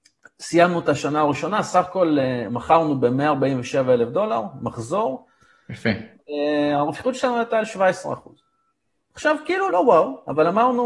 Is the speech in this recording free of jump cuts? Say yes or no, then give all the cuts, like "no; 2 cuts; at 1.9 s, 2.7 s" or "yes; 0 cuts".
no; 1 cut; at 9.7 s